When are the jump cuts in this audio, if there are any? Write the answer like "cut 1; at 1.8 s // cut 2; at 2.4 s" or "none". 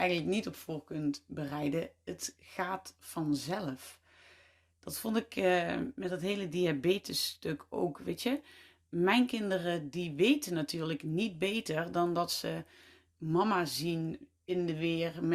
none